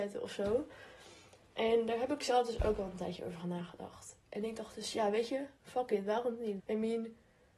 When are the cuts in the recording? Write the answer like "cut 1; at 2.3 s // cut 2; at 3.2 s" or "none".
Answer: cut 1; at 5.6 s // cut 2; at 6.6 s